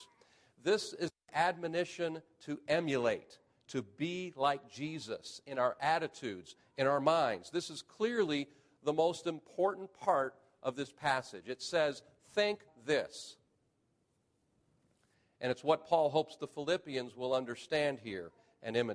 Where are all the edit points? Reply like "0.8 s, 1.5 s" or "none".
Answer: 12.7 s

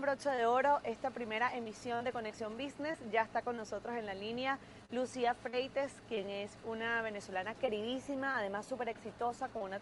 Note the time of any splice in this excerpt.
6.6 s

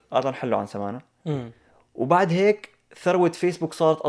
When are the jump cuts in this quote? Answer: none

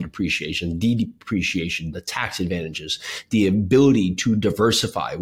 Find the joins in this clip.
1.9 s

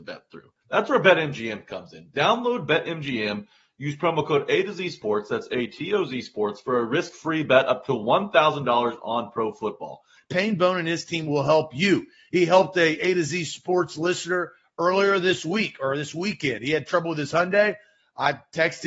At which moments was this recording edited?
10.2 s

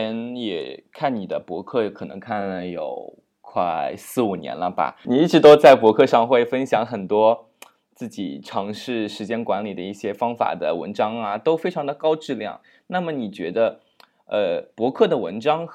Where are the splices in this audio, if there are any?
none

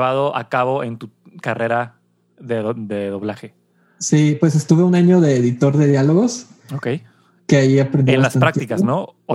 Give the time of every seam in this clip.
none

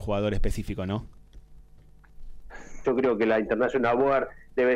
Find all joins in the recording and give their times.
2.8 s

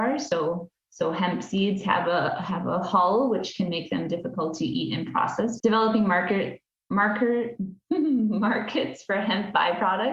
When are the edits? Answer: 5.6 s

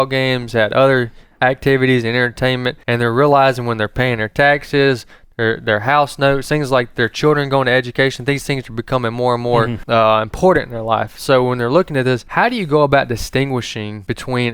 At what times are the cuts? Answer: 2.8 s

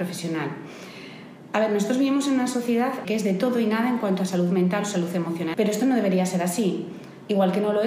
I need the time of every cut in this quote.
3.0 s, 5.5 s

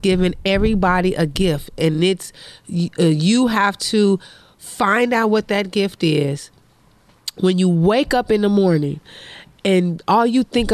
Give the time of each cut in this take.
none

